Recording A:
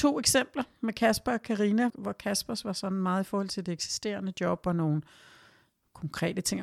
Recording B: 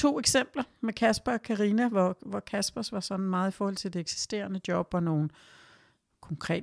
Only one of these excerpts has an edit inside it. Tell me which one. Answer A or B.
A